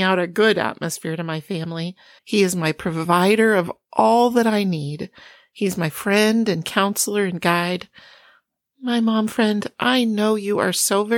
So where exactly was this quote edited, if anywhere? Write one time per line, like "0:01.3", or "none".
0:02.2